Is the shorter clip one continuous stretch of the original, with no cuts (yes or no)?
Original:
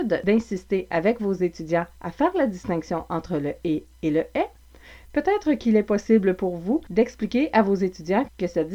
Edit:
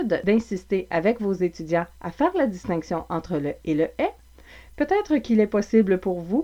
no